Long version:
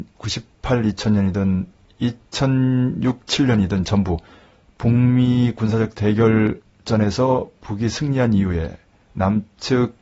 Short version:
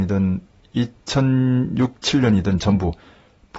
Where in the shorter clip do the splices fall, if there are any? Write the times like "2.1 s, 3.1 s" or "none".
none